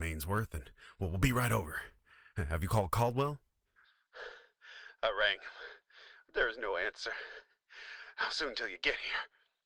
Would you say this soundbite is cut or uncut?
uncut